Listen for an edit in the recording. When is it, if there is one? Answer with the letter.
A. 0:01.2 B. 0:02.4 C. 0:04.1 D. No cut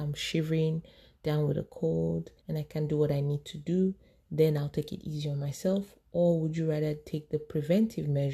B